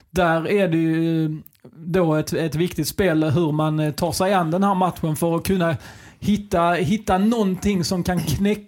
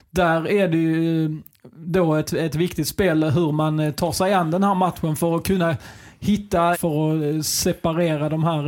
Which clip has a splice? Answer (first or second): second